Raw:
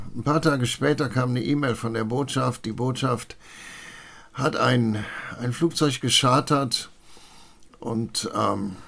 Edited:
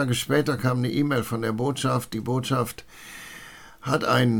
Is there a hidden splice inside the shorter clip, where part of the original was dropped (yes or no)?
no